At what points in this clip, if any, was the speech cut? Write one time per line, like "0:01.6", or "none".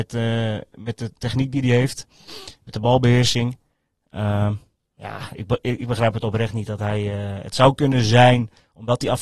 none